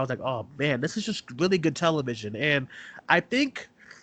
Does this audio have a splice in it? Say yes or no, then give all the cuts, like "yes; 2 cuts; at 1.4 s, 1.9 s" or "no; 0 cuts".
no; 0 cuts